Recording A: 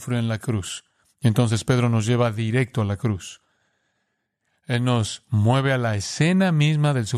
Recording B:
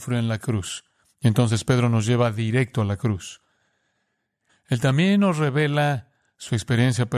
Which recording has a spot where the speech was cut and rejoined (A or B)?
B